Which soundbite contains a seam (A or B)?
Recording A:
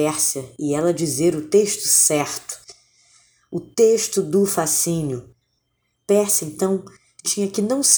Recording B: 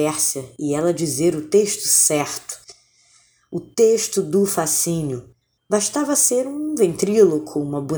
B